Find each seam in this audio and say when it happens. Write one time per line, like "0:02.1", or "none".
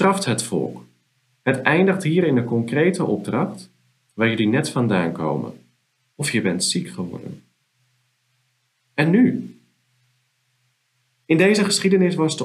0:04.1
0:06.1